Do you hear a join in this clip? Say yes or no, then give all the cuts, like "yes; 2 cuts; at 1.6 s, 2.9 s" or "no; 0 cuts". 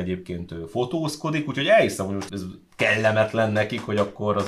yes; 1 cut; at 2.3 s